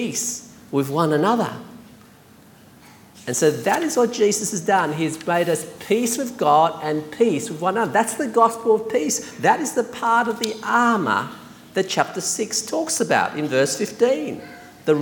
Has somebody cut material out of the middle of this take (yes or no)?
no